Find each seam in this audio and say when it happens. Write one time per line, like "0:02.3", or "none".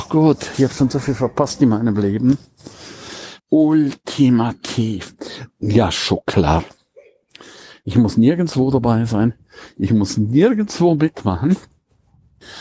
0:03.4
0:05.5